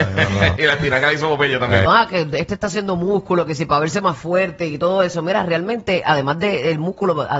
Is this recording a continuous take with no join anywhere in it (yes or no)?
no